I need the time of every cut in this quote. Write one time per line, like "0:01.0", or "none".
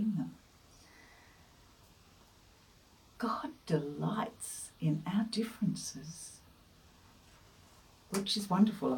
none